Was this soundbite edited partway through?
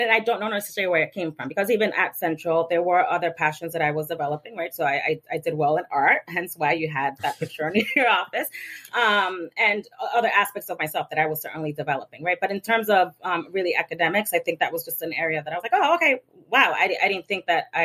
no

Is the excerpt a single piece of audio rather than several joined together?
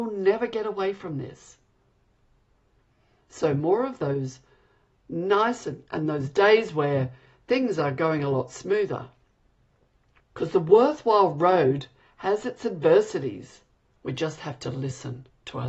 no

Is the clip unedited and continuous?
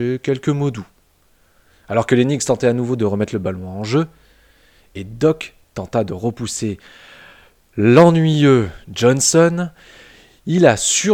yes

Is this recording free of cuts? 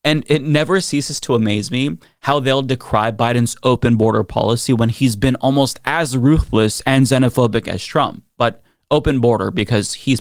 yes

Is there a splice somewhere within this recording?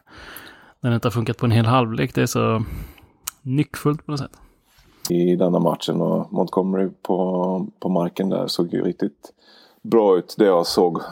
yes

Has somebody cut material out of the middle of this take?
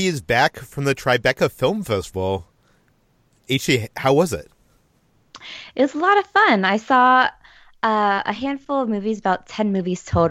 no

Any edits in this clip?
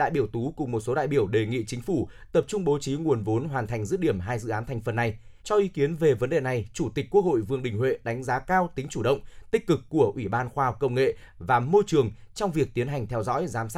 yes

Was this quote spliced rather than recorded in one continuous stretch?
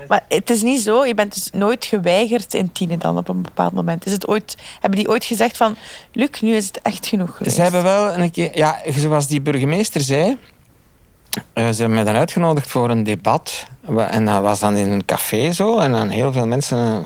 no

